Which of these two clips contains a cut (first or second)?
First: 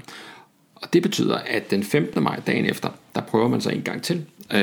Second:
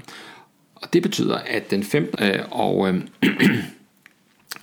second